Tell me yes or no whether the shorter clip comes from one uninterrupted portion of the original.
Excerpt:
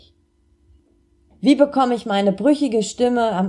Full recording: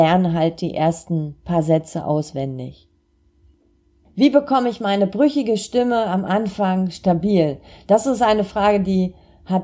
yes